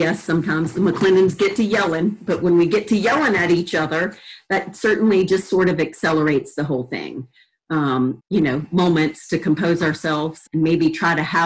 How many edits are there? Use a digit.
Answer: 2